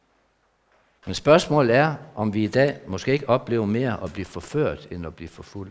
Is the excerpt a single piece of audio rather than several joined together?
no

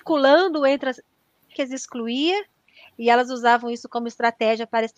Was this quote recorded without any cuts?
no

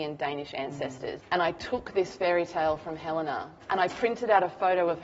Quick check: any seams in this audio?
yes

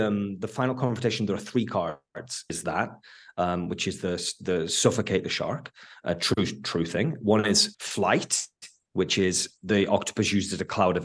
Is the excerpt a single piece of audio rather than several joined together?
no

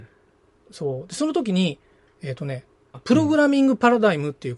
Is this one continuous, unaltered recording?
no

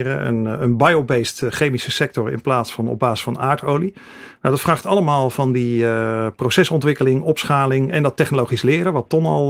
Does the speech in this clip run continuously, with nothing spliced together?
yes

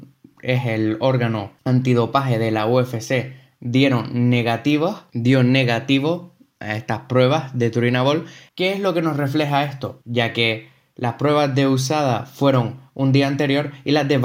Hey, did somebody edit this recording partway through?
yes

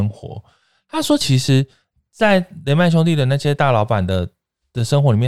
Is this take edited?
no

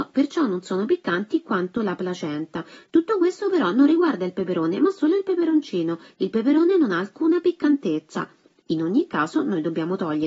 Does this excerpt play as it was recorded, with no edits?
yes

